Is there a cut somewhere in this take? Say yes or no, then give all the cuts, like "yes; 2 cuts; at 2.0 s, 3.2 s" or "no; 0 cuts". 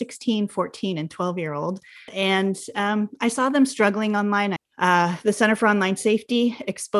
yes; 2 cuts; at 2.1 s, 4.6 s